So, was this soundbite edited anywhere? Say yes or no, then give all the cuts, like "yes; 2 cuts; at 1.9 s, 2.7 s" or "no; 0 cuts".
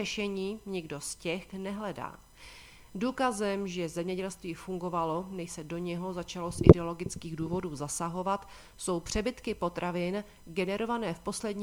yes; 1 cut; at 1.5 s